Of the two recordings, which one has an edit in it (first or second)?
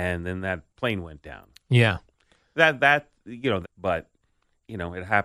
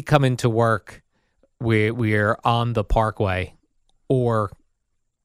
first